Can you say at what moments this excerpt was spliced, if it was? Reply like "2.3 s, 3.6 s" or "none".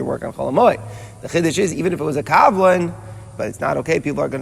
1.7 s, 3.4 s